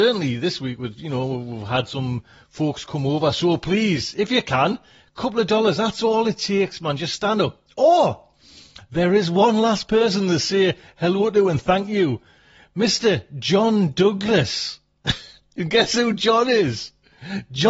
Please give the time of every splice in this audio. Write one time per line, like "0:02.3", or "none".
none